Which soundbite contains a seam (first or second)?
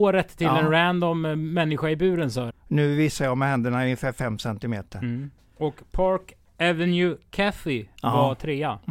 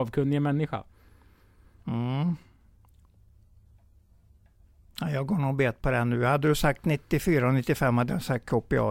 first